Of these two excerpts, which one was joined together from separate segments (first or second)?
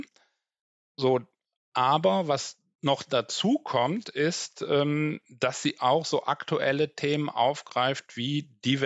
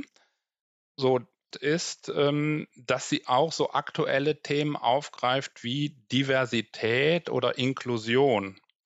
second